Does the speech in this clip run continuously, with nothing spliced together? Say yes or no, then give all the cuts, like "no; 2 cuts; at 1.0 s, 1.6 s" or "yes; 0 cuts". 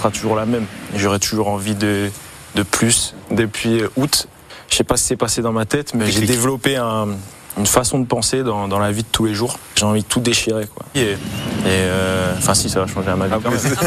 no; 2 cuts; at 6.0 s, 10.9 s